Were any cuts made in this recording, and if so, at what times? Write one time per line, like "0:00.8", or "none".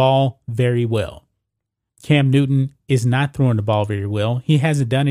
0:01.9